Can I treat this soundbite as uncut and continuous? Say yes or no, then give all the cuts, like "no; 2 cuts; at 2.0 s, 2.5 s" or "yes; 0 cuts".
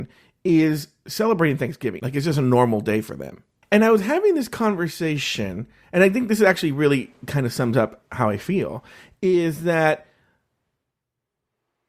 no; 2 cuts; at 2.0 s, 3.6 s